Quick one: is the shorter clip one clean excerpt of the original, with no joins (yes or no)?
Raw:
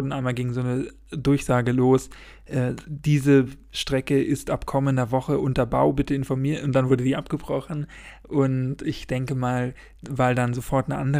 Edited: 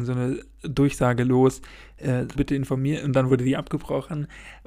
no